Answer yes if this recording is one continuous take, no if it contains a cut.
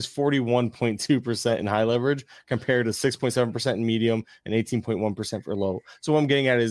yes